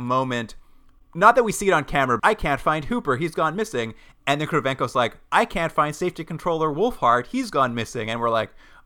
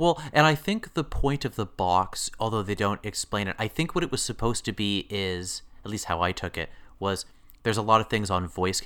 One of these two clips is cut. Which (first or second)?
first